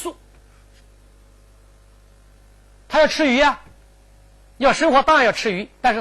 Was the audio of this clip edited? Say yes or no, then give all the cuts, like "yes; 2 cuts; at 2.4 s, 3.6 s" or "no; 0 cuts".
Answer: no; 0 cuts